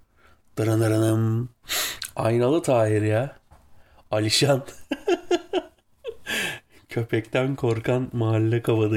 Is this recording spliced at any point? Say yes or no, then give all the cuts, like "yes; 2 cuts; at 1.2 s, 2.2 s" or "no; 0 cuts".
no; 0 cuts